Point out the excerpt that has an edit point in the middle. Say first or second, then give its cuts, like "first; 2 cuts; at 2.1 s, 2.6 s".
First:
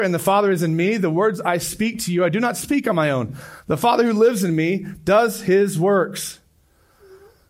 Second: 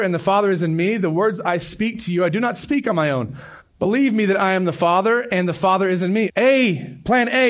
second; 2 cuts; at 3.6 s, 6.3 s